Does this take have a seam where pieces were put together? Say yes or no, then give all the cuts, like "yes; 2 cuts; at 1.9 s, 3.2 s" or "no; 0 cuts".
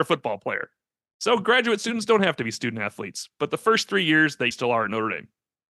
yes; 1 cut; at 4.5 s